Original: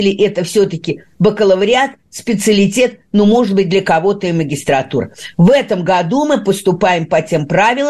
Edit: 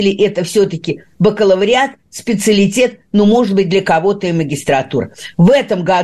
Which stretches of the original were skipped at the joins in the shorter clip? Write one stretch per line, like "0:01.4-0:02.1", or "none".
none